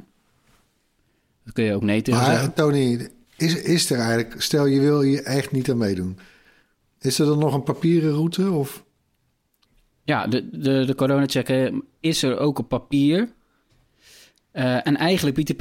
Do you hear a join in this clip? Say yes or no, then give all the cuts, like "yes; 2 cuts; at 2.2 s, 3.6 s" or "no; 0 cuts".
no; 0 cuts